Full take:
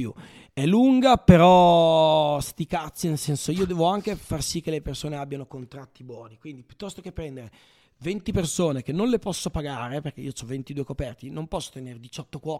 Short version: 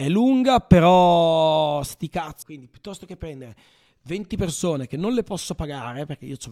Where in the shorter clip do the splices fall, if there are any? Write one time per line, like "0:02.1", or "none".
0:02.4